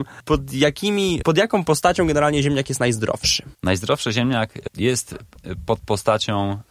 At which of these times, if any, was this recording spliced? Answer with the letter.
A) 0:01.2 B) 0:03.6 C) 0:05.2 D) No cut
A